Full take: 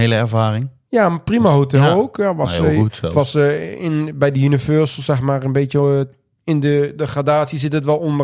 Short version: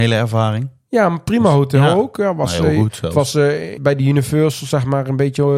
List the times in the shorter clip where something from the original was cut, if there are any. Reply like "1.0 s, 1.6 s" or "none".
3.8 s